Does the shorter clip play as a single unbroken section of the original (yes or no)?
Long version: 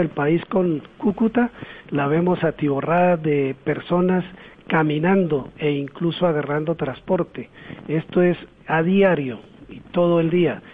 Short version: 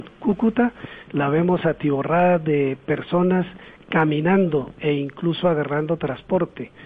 yes